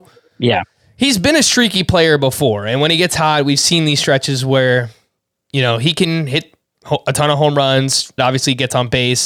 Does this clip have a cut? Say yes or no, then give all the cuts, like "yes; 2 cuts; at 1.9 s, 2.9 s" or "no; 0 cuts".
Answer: yes; 1 cut; at 8.2 s